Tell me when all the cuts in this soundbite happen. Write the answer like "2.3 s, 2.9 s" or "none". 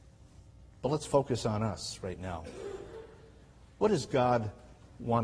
none